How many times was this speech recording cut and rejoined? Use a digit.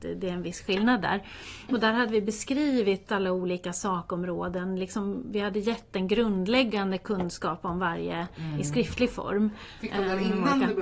1